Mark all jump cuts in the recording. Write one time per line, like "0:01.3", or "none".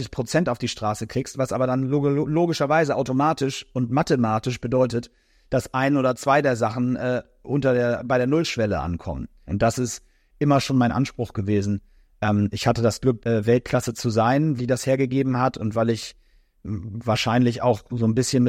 0:09.5
0:13.2
0:14.6